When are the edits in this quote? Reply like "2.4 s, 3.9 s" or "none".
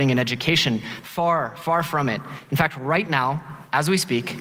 none